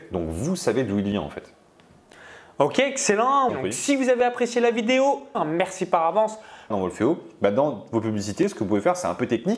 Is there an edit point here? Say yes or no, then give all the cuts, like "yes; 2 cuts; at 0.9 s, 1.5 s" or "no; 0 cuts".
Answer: yes; 3 cuts; at 3.5 s, 5.3 s, 6.7 s